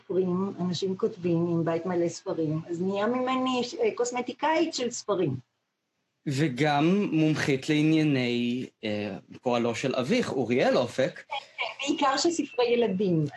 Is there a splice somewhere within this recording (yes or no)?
no